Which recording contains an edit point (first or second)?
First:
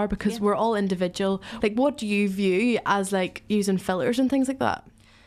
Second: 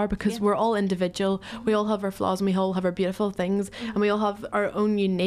first